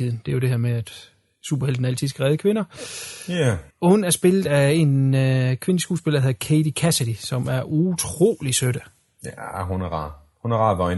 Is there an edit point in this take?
yes; 1 cut; at 3.7 s

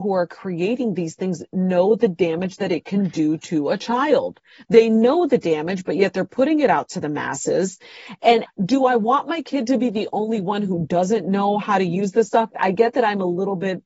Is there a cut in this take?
yes; 2 cuts; at 8.5 s, 12.5 s

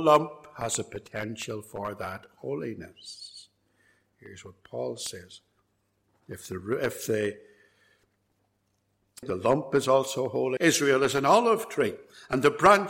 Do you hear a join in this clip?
yes; 2 cuts; at 9.2 s, 10.6 s

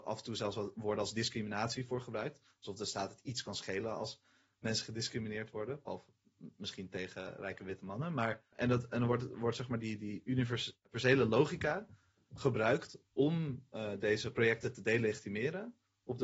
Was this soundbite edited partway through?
no; 0 cuts

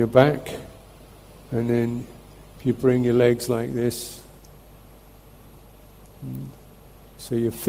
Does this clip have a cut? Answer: no; 0 cuts

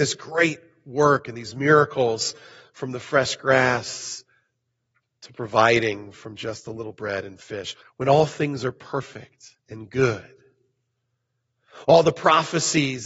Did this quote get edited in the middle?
yes; 2 cuts; at 7.8 s, 9.6 s

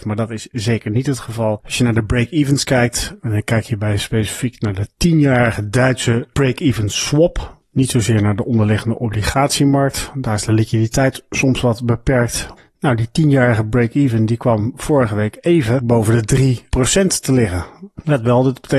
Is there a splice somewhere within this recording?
yes; 1 cut; at 15.8 s

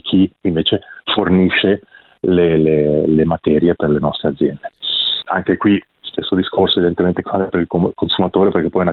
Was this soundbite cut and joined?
yes; 1 cut; at 5.2 s

